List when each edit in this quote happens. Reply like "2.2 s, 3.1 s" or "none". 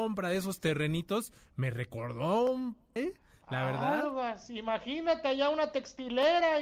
3.0 s